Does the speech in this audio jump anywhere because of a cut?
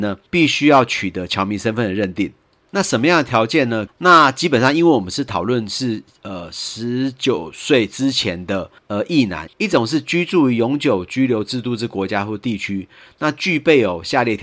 yes; 2 cuts; at 3.9 s, 9.5 s

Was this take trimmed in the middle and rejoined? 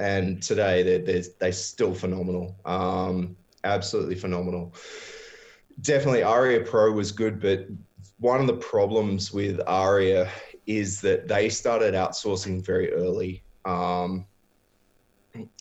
no; 0 cuts

